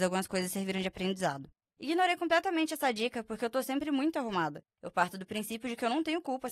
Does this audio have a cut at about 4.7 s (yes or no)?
yes